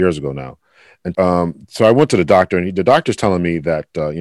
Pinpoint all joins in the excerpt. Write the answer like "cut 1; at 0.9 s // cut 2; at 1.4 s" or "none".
cut 1; at 1.1 s